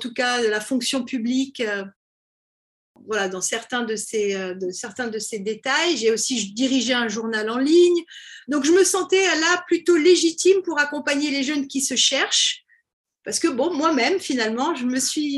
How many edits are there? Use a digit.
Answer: 0